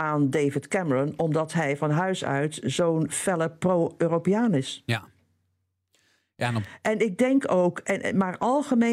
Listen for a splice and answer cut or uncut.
uncut